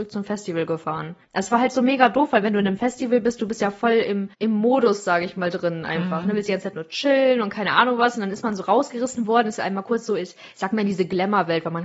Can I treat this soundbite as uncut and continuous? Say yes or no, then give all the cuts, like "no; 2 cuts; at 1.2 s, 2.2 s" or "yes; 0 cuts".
yes; 0 cuts